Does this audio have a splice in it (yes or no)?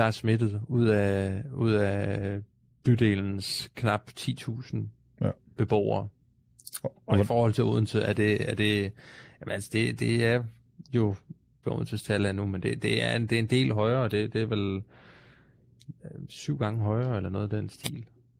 yes